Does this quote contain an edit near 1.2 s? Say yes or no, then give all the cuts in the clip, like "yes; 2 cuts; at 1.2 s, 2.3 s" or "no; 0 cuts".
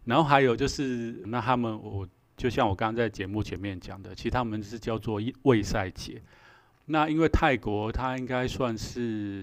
yes; 1 cut; at 1.2 s